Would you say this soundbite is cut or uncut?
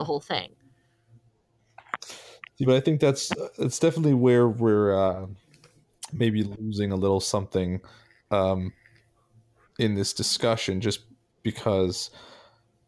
uncut